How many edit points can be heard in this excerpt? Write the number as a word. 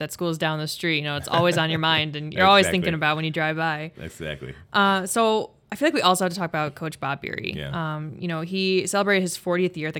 zero